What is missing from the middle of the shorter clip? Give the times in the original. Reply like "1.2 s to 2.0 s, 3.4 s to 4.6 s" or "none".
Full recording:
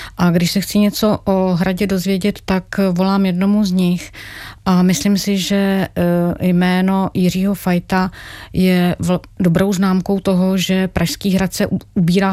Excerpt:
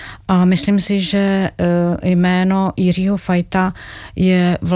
none